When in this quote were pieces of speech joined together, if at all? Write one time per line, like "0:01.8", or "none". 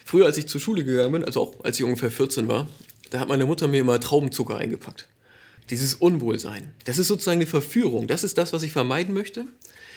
0:05.6
0:06.8